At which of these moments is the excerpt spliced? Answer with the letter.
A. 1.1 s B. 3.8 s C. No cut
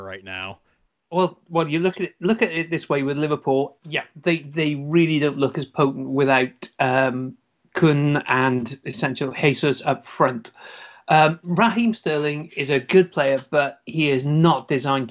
B